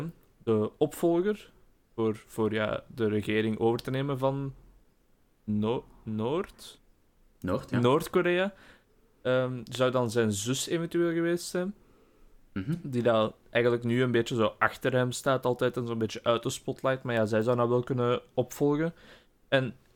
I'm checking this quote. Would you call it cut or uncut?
uncut